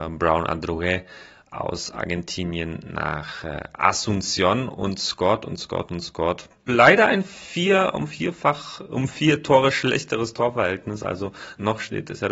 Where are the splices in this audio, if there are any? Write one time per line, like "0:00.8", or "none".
0:06.7

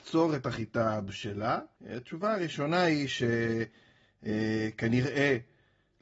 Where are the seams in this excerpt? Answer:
0:01.8

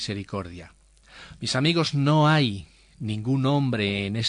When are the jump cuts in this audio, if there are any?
0:01.4

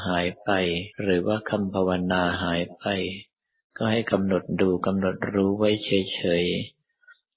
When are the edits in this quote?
0:00.9

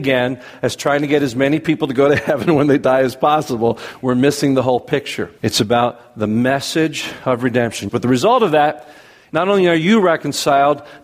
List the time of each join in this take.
0:05.4
0:07.9

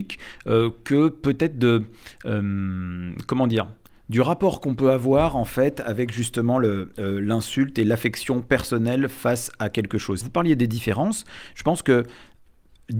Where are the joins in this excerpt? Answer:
0:10.2

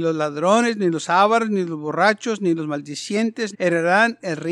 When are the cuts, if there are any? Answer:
0:03.5

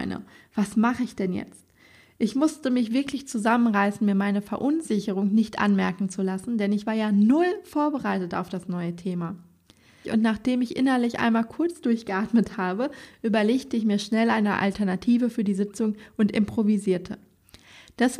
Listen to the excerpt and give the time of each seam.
0:10.0

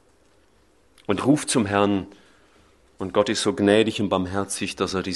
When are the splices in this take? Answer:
0:01.2

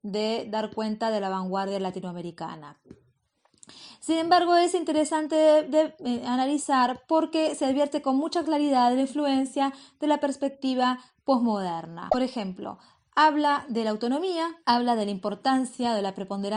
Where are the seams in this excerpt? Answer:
0:14.6

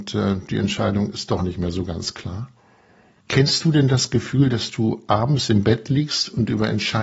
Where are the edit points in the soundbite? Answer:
0:03.2

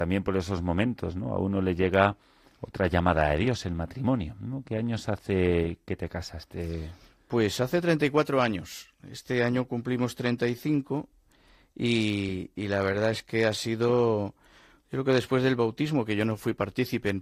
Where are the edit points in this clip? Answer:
none

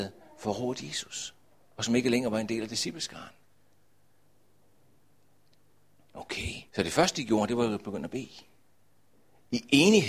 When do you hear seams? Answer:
0:06.7

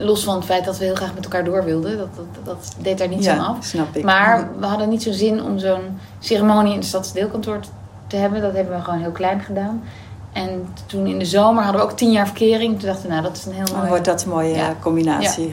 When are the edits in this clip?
none

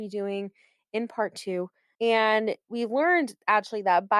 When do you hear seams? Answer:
0:01.9

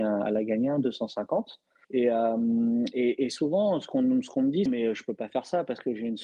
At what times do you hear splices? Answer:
0:01.8
0:04.7

